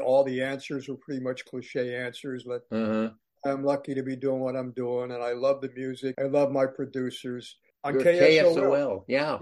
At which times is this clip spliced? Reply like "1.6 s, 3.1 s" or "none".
6.1 s, 7.7 s